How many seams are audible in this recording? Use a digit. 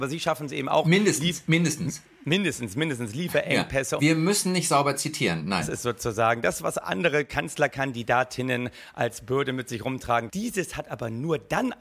2